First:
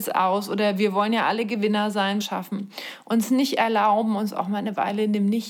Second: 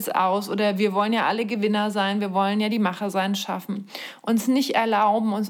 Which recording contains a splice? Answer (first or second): first